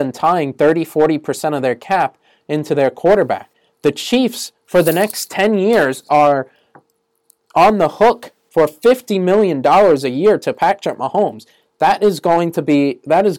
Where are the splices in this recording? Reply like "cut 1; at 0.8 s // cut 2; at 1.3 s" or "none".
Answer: none